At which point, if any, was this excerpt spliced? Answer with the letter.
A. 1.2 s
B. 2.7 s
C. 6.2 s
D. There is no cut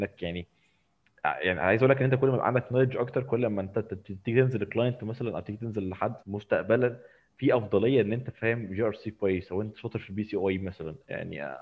C